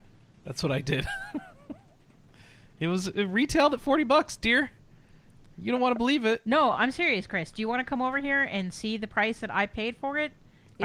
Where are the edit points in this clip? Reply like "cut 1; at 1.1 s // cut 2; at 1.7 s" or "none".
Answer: none